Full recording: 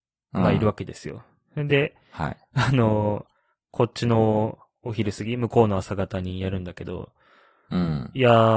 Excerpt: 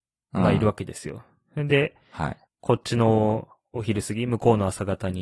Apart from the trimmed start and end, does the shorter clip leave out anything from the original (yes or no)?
yes